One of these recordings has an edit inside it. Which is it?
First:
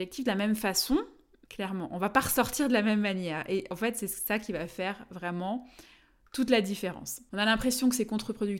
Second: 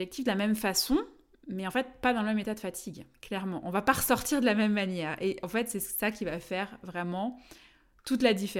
first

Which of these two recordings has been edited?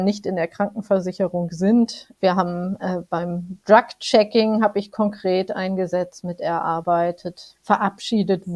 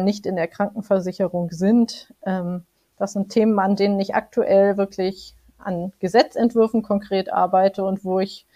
first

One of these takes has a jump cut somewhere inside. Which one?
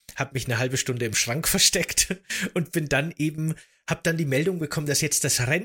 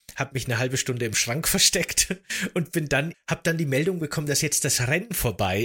second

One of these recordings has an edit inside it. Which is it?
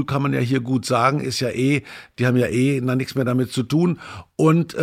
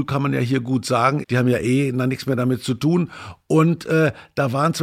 second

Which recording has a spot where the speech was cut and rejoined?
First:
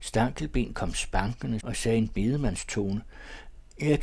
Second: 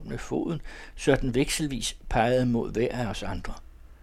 first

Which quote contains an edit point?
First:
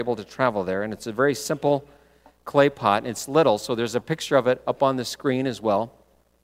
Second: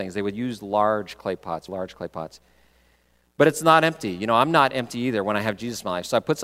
second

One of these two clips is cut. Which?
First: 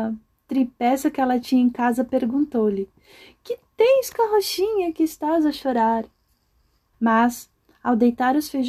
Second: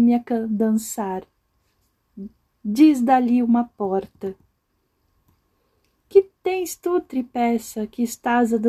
first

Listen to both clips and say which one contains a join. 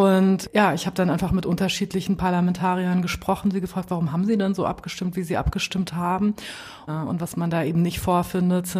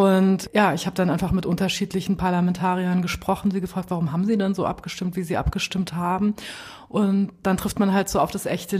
first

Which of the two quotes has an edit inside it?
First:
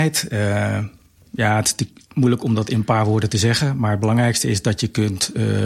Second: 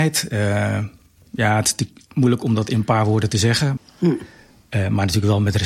second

